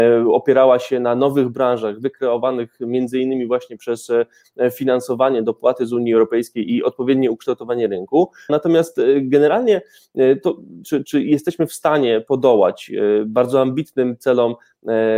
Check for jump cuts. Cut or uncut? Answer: cut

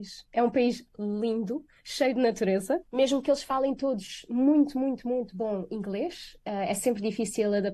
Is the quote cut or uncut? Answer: cut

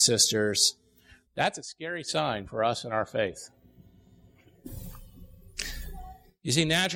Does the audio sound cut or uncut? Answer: cut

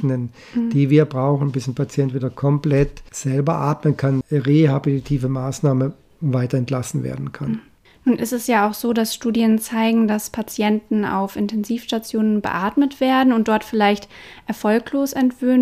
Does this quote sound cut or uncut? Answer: cut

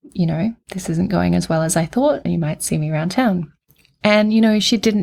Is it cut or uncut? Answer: cut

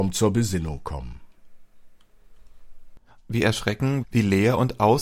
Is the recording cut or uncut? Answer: cut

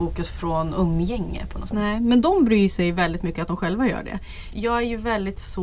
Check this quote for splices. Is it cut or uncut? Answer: cut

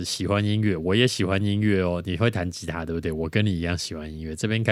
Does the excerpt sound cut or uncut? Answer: uncut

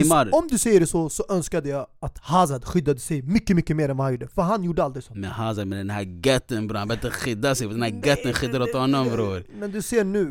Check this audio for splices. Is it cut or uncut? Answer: uncut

